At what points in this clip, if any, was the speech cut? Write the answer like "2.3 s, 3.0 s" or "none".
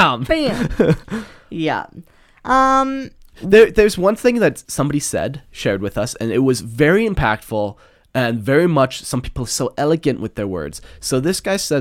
4.6 s